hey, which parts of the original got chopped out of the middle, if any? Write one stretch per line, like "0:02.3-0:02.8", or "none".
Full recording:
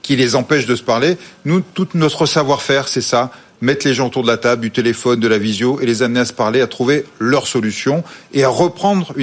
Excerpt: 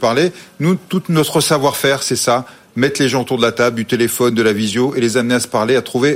none